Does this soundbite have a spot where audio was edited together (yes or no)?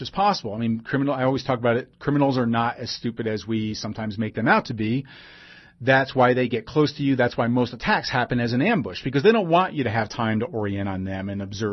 no